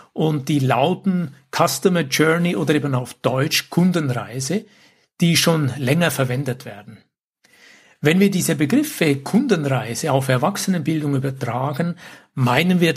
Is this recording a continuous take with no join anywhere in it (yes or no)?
yes